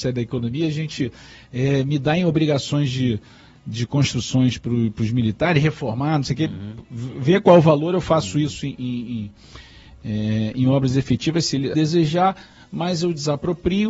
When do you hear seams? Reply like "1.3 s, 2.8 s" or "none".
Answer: 11.7 s